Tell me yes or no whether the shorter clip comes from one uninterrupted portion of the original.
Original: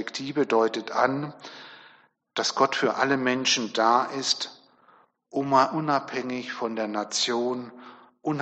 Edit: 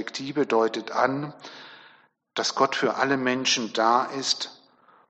yes